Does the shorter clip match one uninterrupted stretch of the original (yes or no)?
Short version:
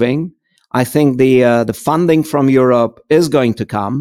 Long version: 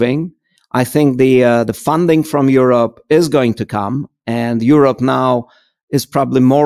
yes